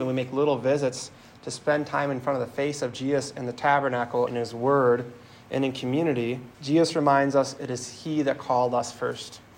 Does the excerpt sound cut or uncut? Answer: cut